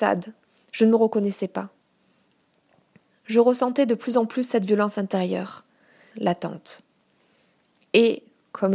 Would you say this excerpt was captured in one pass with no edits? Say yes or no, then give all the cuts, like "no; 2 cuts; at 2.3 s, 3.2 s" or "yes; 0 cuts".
no; 1 cut; at 6.1 s